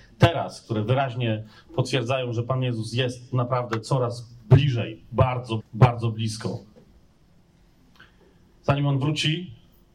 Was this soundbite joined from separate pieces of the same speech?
yes; 1 cut; at 5.6 s

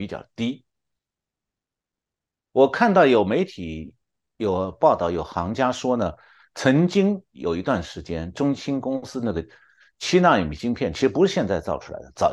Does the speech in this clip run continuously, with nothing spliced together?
yes; 0 cuts

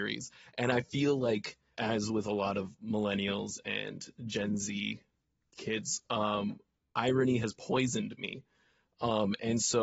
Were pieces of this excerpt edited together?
yes; 1 cut; at 1.7 s

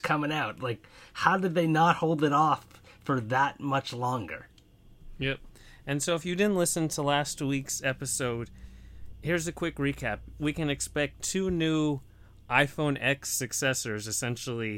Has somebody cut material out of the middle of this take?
no; 0 cuts

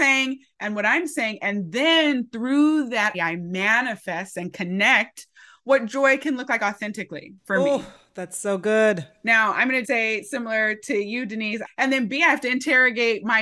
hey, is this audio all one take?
no; 3 cuts; at 3.1 s, 9.8 s, 11.7 s

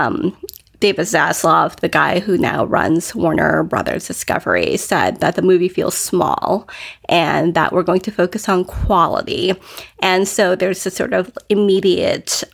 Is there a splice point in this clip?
no; 0 cuts

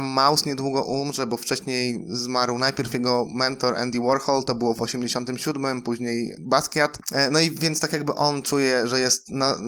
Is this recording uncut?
yes; 0 cuts

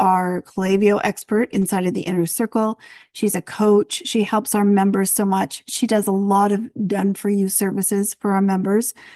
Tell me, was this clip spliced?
no; 0 cuts

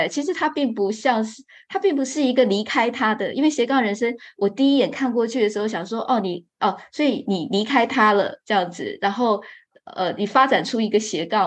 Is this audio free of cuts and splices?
yes; 0 cuts

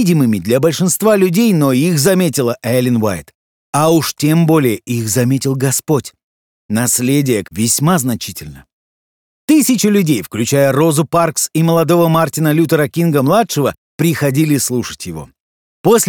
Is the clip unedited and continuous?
no; 2 cuts; at 7.4 s, 9.3 s

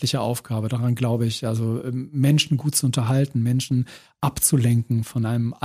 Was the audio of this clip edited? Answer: no; 0 cuts

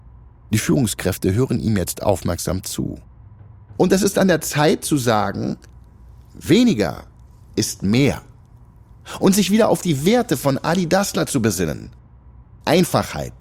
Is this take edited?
no; 0 cuts

